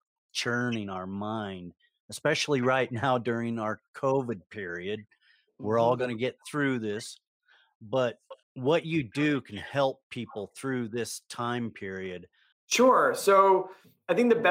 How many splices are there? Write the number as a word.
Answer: two